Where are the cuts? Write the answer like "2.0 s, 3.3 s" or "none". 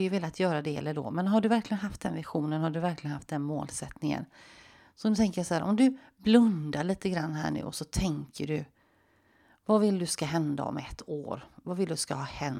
none